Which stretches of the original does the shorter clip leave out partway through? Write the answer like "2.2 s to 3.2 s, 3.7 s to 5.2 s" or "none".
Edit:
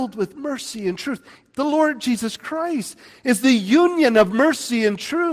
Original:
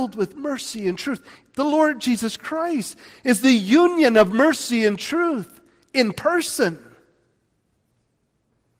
none